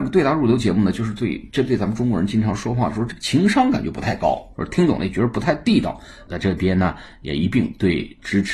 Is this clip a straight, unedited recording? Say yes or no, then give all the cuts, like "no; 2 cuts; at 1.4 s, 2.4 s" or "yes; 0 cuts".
no; 2 cuts; at 4.6 s, 6.3 s